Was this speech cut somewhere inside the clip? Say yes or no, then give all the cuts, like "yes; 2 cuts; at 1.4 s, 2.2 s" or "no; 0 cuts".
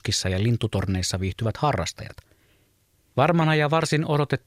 yes; 1 cut; at 3.1 s